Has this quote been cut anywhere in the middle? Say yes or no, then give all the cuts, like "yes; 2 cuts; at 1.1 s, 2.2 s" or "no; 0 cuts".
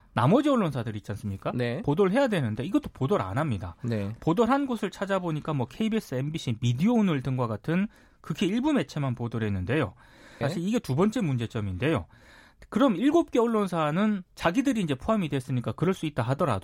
yes; 1 cut; at 10.4 s